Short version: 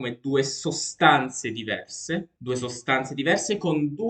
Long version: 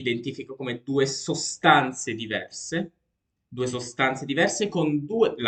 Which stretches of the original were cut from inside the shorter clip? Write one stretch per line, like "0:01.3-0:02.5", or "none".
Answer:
0:03.0-0:03.5